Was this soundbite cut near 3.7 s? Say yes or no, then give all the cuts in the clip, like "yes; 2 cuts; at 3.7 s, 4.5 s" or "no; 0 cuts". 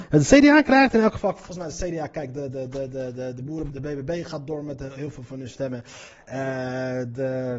yes; 1 cut; at 3.7 s